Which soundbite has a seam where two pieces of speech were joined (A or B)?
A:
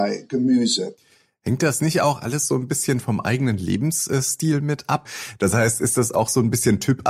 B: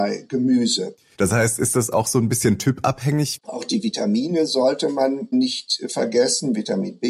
B